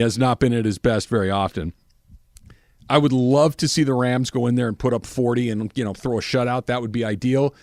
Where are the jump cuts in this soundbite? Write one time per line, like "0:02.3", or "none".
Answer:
none